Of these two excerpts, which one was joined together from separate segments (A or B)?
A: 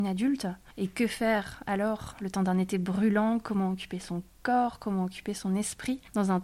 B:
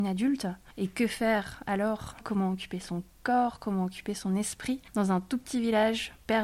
B